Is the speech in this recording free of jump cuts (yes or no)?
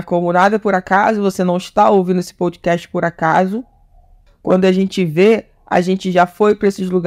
no